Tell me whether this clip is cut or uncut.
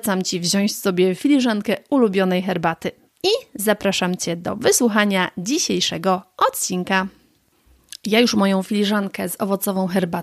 cut